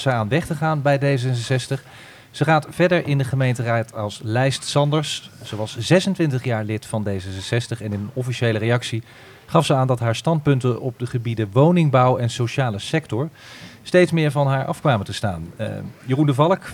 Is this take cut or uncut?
uncut